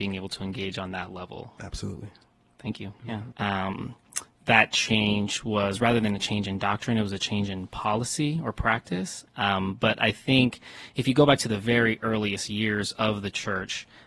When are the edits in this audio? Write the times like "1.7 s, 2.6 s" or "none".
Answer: 3.3 s, 9.3 s